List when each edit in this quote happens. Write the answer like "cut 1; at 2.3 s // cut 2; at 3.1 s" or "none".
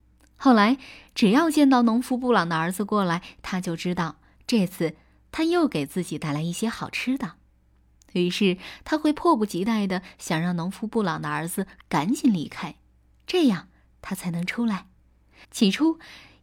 cut 1; at 15.4 s